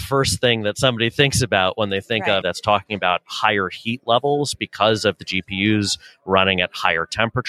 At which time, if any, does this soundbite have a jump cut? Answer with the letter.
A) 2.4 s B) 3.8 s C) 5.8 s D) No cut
A